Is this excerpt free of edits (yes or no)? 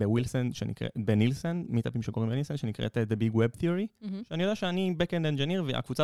yes